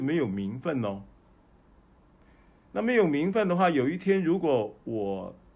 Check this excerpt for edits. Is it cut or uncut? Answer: uncut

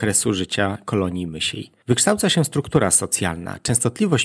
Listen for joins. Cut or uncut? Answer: uncut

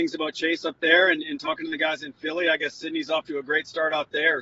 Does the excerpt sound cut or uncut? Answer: uncut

